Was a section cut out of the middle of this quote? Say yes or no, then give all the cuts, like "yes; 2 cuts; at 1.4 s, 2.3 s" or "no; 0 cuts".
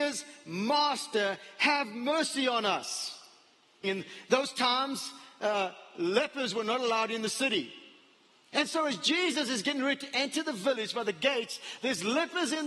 yes; 2 cuts; at 3.8 s, 8.5 s